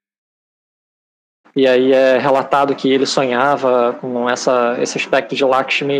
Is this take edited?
yes; 1 cut; at 1.4 s

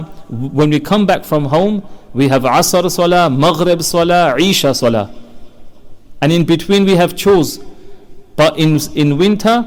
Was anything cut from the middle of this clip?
no; 0 cuts

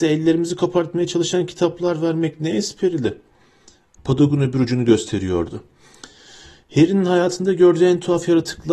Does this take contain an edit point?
yes; 1 cut; at 4.0 s

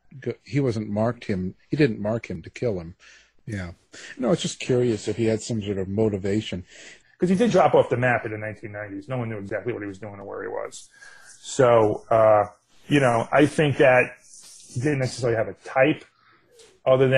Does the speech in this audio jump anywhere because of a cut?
yes; 2 cuts; at 3.4 s, 7.0 s

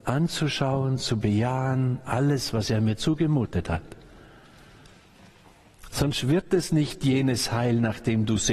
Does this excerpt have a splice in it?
no; 0 cuts

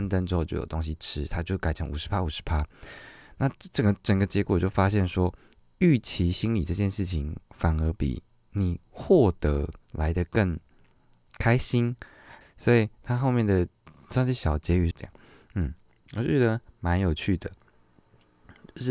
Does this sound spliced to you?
yes; 2 cuts; at 12.4 s, 14.9 s

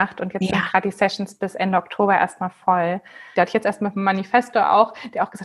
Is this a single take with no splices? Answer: no; 1 cut; at 3.3 s

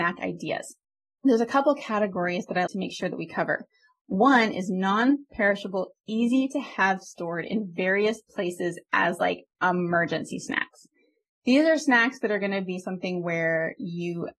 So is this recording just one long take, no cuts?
no; 2 cuts; at 2.7 s, 9.5 s

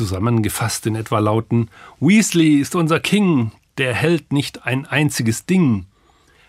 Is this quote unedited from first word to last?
yes; 0 cuts

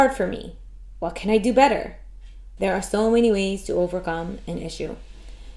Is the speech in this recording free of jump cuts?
no; 1 cut; at 2.6 s

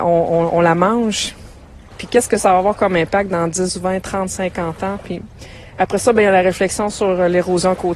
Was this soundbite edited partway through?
yes; 1 cut; at 1.9 s

